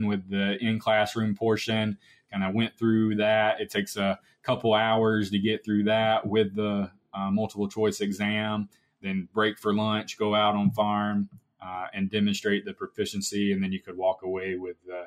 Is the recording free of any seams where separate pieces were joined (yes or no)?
yes